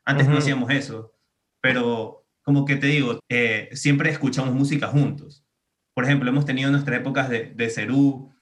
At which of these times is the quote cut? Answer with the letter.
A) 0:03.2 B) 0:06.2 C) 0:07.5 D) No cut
A